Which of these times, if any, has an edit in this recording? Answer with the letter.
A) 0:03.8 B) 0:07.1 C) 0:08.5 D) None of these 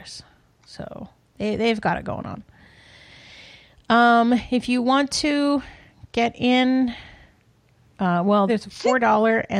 C